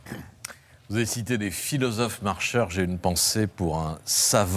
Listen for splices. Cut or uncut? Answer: uncut